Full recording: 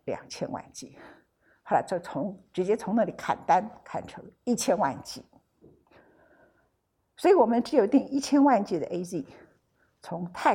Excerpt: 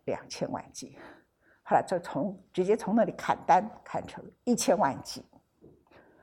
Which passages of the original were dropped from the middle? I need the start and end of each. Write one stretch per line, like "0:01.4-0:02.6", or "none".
none